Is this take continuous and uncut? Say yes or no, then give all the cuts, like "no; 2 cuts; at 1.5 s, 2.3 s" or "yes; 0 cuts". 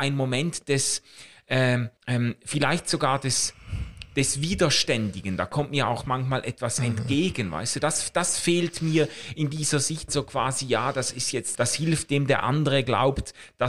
no; 3 cuts; at 2.0 s, 10.1 s, 11.5 s